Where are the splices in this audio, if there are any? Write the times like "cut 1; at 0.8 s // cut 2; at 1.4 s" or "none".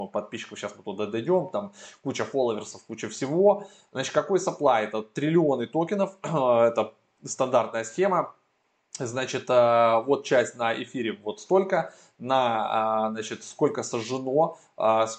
none